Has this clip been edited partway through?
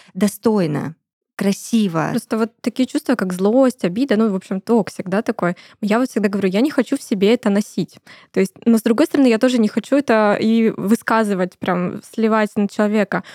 no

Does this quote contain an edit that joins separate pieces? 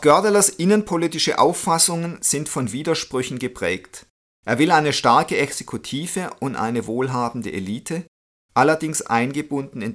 no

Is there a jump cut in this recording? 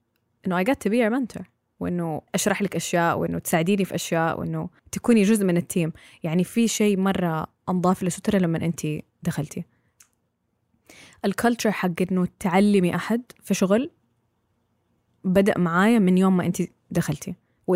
yes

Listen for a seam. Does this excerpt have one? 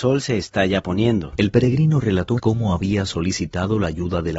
yes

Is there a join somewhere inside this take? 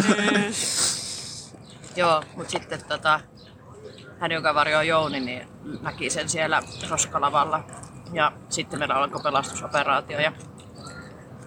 no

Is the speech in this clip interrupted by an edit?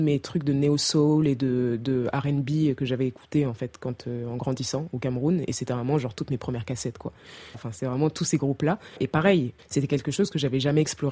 yes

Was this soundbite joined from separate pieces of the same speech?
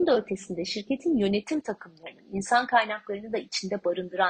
no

